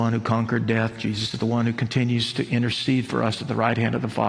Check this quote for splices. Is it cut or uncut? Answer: uncut